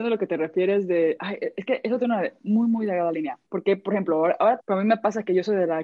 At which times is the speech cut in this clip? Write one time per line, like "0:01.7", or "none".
0:03.5
0:04.6